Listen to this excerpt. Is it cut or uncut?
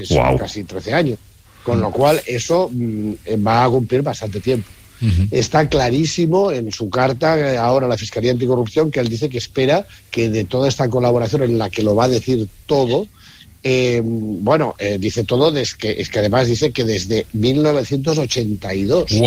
uncut